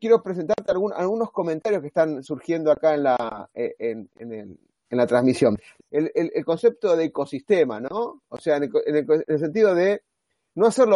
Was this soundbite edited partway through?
yes; 1 cut; at 5.8 s

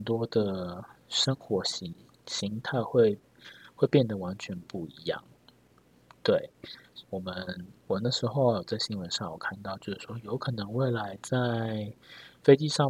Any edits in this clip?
yes; 1 cut; at 7.0 s

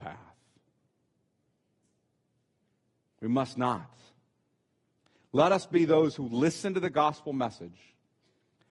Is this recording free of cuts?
yes; 0 cuts

